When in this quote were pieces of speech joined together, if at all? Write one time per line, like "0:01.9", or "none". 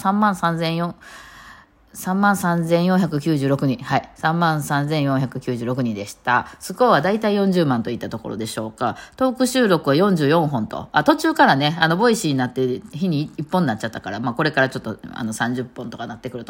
0:12.9